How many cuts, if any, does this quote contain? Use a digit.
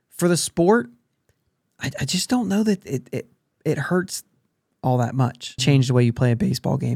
1